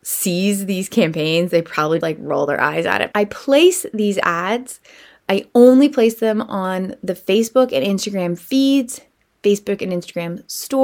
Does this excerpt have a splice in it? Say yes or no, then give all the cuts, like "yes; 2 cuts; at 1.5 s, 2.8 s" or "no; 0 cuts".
yes; 2 cuts; at 2.0 s, 3.1 s